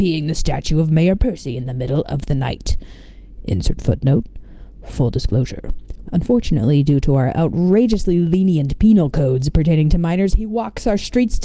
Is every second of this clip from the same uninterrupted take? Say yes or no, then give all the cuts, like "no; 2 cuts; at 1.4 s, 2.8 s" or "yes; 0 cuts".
no; 1 cut; at 6.0 s